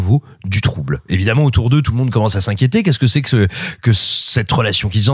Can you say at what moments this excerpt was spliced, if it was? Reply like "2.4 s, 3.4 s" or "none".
none